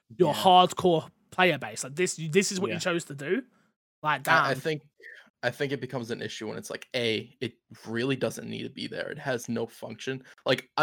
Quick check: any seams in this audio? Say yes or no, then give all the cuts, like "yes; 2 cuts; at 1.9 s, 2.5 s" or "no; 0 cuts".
no; 0 cuts